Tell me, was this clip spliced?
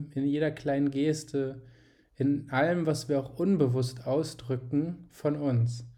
no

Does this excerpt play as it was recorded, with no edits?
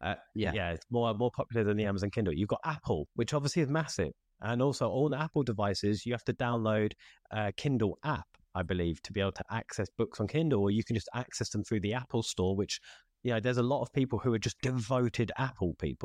yes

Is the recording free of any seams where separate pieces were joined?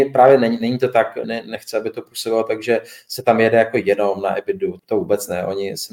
no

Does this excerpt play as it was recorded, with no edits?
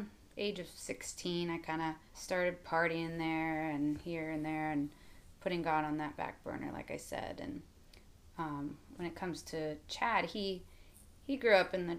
no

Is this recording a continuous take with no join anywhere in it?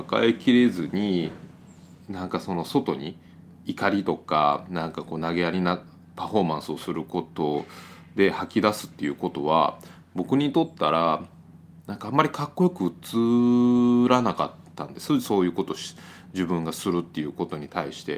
yes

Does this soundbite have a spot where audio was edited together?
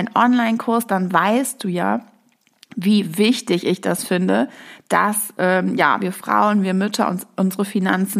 no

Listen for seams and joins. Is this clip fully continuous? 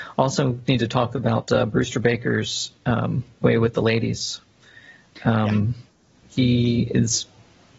yes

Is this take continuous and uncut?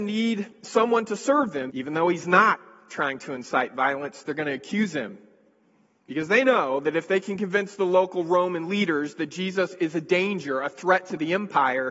no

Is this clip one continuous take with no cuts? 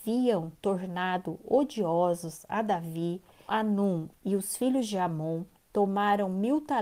no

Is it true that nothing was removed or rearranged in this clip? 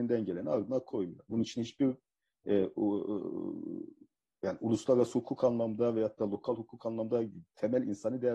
no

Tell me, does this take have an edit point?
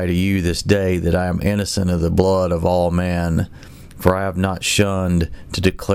no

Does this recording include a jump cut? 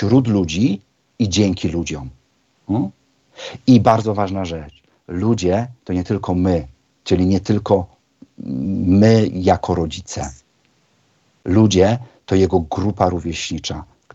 no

